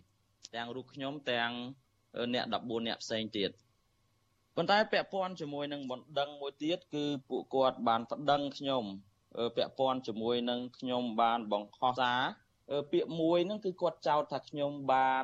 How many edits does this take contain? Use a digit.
1